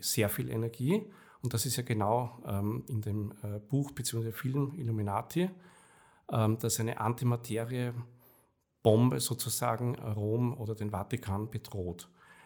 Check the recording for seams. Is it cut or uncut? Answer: cut